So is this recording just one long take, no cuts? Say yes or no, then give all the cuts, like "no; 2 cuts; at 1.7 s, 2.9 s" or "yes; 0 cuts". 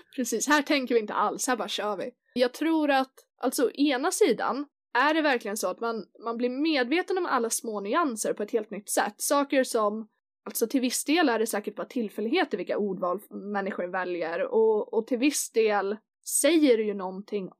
no; 1 cut; at 2.4 s